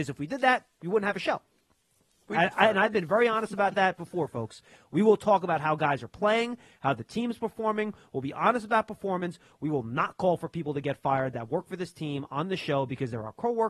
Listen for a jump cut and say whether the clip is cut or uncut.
uncut